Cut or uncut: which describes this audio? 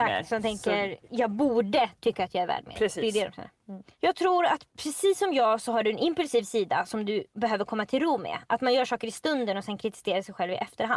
uncut